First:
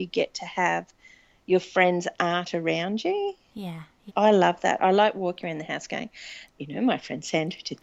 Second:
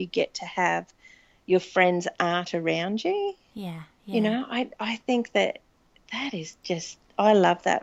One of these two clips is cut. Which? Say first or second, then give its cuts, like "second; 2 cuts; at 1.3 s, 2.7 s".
first; 2 cuts; at 4.1 s, 6.5 s